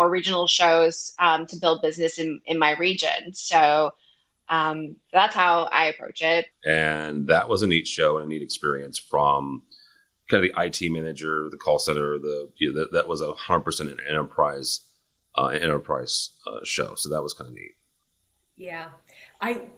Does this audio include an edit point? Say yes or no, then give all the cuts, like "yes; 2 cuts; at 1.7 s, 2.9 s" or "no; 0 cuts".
yes; 1 cut; at 6.5 s